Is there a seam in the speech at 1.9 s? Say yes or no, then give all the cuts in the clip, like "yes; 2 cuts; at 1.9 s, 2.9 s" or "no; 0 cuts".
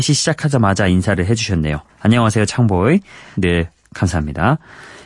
no; 1 cut; at 3.3 s